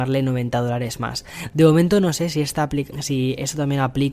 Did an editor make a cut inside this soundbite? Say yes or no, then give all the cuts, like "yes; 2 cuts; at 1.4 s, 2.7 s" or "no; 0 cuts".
yes; 1 cut; at 2.9 s